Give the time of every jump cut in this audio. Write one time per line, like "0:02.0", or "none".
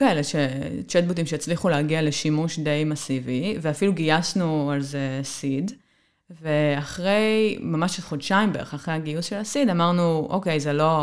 none